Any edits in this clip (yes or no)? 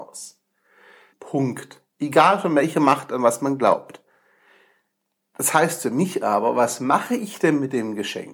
yes